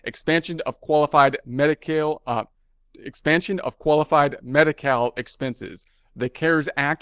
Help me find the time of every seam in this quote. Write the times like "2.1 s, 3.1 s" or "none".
none

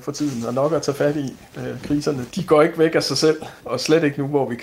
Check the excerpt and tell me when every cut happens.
2.3 s, 3.6 s

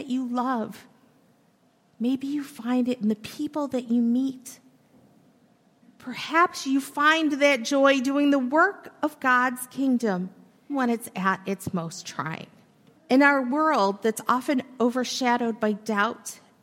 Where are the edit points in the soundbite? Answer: 10.7 s, 13.0 s

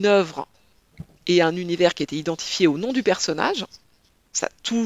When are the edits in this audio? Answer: none

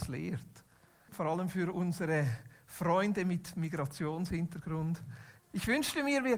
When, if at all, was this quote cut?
1.1 s, 5.4 s

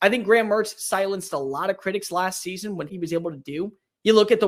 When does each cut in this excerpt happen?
2.9 s

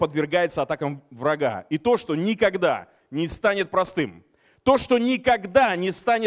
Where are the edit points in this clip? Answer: none

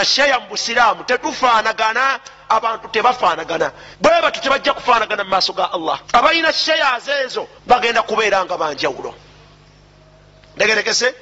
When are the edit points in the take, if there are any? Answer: 3.9 s, 6.0 s, 7.6 s

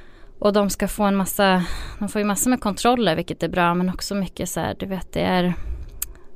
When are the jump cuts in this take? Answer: none

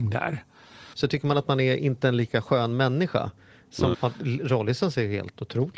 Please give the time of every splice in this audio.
0.9 s, 3.9 s

